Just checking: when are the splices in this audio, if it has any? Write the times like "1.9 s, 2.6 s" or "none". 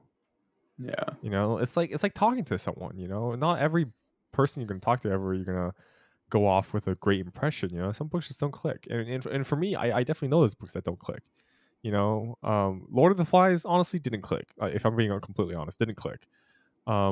none

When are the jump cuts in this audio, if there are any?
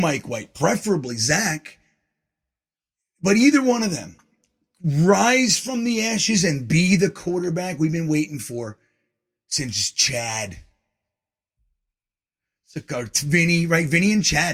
none

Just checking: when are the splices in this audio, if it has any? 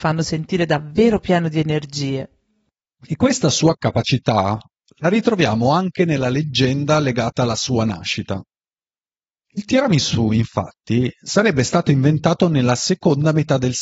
2.9 s

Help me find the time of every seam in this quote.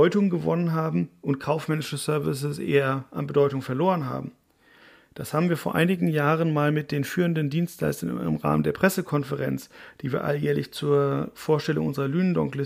none

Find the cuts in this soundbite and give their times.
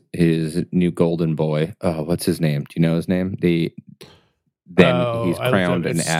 none

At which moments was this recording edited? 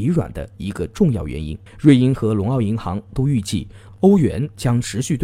1.7 s

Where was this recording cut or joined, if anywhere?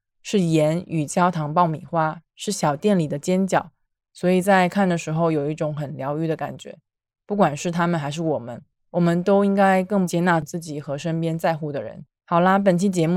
4.0 s

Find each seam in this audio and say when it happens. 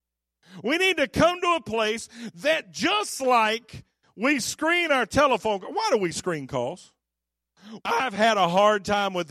7.8 s

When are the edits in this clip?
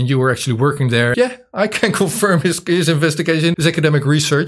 1.1 s, 3.5 s

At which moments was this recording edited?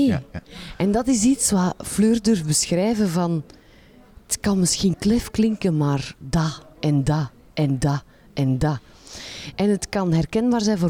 none

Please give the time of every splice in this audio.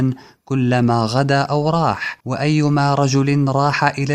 2.2 s

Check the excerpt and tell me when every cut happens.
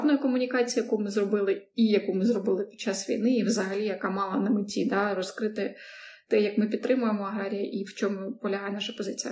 none

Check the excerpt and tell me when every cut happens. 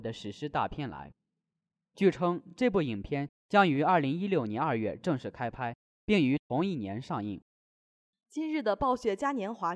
none

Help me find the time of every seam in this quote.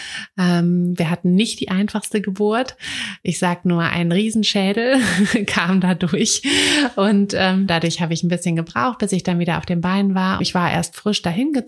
7.7 s, 10.4 s

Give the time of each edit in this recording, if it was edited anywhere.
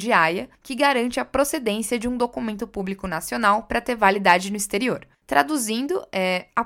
5.1 s

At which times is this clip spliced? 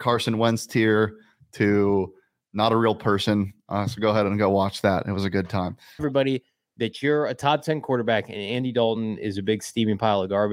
6.0 s

